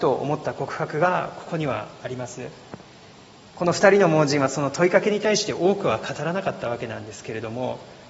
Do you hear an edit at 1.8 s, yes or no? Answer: no